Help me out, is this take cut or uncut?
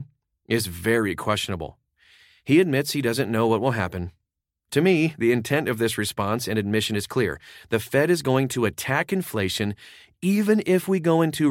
uncut